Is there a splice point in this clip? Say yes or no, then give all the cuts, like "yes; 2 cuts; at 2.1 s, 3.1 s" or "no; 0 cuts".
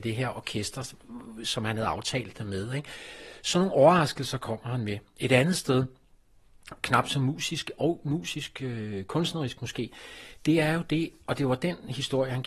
no; 0 cuts